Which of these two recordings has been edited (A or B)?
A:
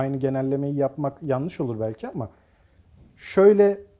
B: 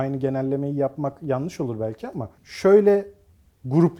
B